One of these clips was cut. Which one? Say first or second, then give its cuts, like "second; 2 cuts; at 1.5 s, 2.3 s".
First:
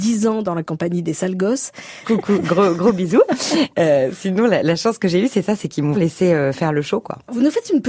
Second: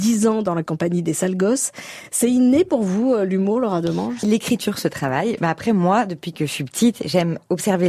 first; 2 cuts; at 2.0 s, 5.9 s